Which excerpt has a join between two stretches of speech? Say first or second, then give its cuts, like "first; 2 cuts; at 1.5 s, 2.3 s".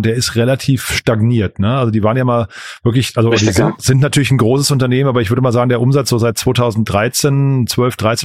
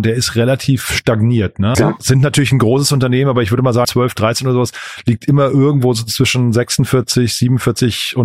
second; 2 cuts; at 1.7 s, 3.8 s